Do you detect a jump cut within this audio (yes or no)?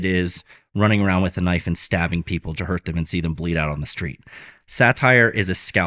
yes